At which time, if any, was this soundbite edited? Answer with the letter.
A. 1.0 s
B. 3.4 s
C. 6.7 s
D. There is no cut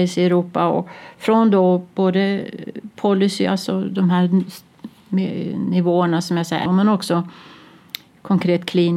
C